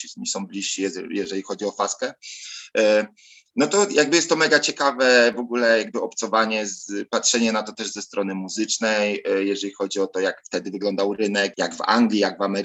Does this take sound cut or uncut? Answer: cut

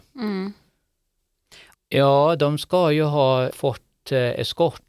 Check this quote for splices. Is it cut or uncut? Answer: cut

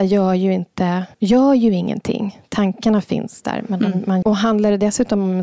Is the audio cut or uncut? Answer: cut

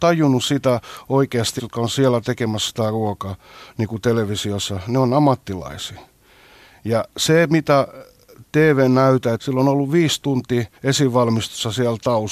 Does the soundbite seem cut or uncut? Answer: cut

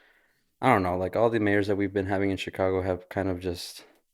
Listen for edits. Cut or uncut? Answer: uncut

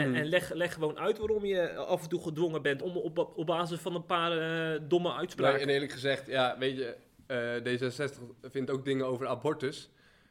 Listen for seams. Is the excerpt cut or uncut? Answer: cut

